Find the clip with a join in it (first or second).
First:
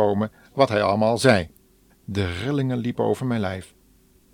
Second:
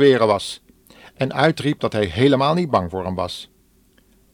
first